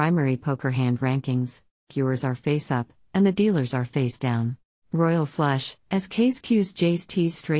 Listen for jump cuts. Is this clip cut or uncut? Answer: cut